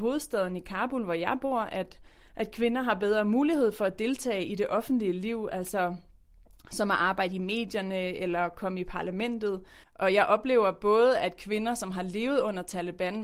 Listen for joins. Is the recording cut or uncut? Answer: cut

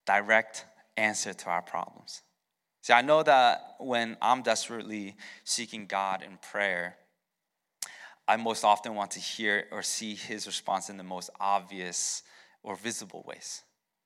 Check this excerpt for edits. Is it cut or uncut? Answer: uncut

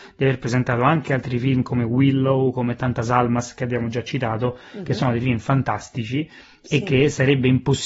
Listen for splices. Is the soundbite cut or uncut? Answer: uncut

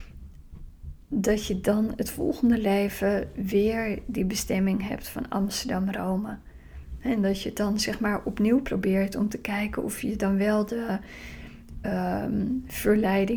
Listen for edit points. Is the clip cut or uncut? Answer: uncut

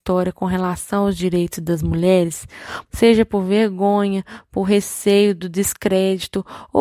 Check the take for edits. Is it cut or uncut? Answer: cut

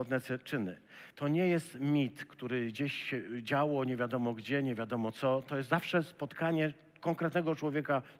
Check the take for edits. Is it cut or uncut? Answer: cut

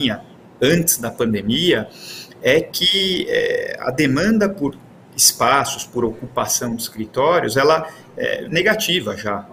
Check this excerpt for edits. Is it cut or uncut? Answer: cut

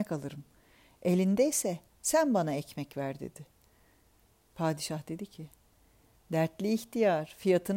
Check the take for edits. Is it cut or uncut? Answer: uncut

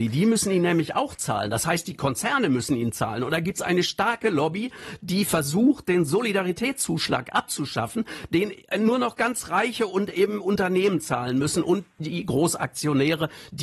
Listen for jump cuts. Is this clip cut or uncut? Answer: uncut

